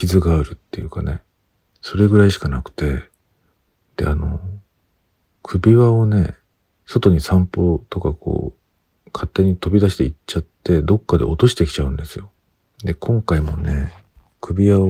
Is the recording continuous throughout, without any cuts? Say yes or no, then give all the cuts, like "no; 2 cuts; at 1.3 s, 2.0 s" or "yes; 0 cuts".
no; 2 cuts; at 1.7 s, 6.7 s